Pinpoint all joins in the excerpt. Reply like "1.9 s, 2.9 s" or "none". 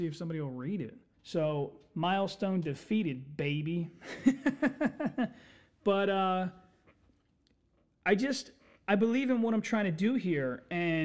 1.1 s